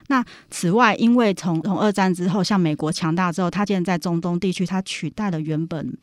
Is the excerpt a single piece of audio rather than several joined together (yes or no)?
no